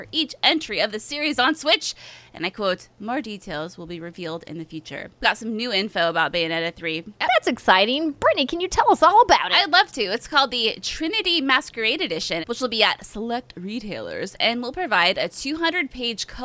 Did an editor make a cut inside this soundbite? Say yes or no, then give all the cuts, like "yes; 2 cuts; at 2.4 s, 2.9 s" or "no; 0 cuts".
yes; 3 cuts; at 5.2 s, 7.2 s, 12.4 s